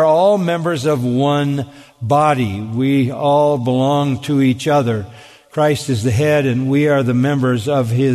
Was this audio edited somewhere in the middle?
no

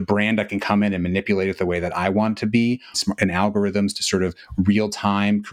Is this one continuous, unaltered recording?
no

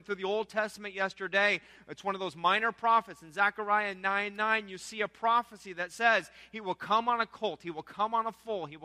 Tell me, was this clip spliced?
no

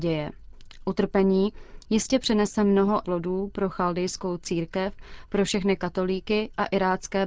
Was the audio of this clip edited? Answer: yes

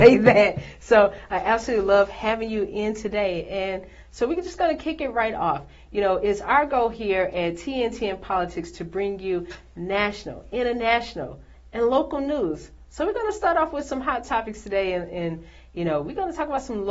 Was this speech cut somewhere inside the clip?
no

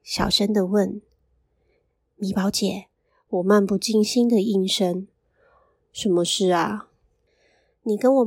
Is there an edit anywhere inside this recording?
yes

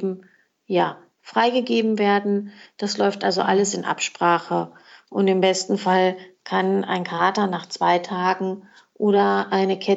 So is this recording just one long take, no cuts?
yes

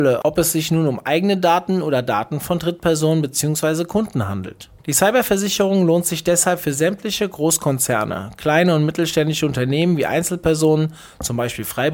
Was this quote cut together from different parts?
yes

